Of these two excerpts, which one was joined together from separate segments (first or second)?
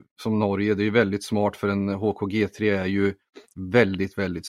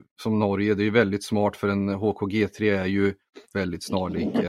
second